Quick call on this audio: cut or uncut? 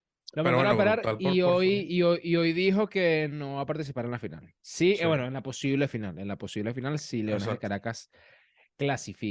cut